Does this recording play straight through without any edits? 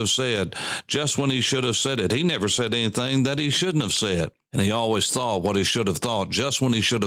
yes; 0 cuts

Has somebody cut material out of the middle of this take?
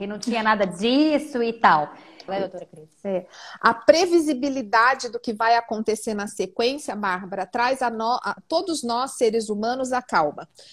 yes; 2 cuts; at 2.3 s, 8.4 s

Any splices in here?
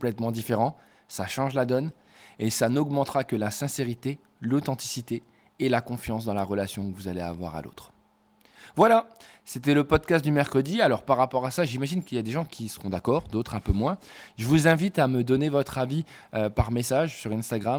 no; 0 cuts

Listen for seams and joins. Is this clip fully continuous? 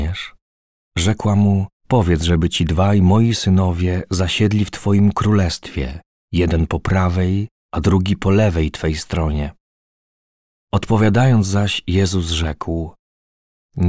no; 1 cut; at 1.8 s

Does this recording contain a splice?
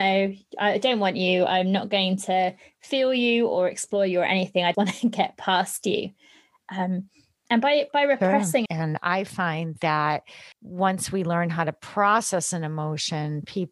yes; 3 cuts; at 4.7 s, 8.7 s, 10.5 s

